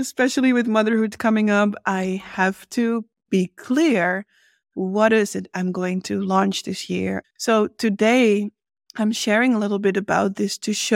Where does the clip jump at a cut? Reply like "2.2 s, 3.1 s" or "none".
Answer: 7.2 s